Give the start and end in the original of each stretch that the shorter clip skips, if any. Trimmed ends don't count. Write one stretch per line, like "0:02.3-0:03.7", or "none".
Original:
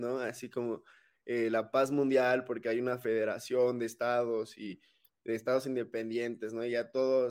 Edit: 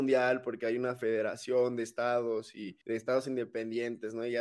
0:04.8-0:05.2